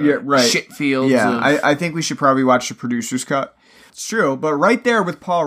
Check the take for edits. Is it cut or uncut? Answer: cut